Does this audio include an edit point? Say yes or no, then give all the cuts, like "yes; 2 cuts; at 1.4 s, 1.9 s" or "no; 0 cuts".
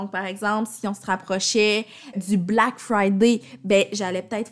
yes; 1 cut; at 2.1 s